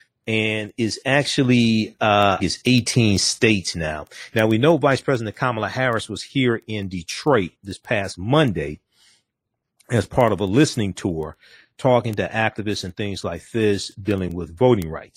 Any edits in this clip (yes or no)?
yes